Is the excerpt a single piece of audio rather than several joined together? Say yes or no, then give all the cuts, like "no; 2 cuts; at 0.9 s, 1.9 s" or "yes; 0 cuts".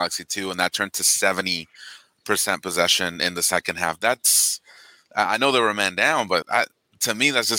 no; 1 cut; at 6.4 s